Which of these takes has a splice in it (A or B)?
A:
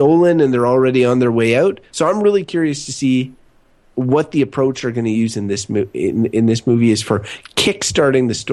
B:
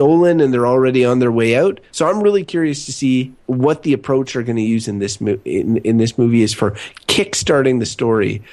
B